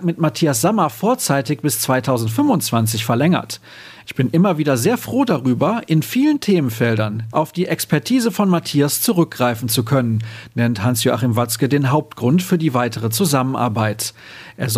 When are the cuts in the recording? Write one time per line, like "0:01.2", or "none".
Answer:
0:07.3